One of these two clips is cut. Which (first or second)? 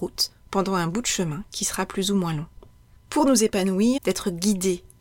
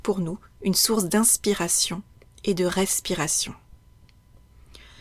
first